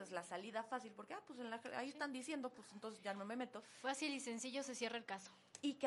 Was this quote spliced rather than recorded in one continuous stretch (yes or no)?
no